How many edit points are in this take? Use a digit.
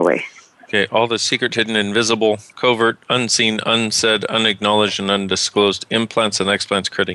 0